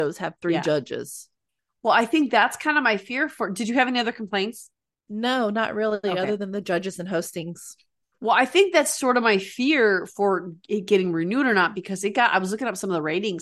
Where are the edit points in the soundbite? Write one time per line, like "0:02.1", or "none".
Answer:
none